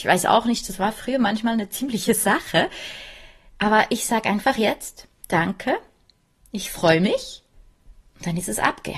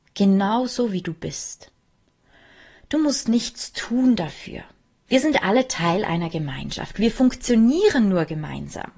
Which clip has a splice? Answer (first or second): second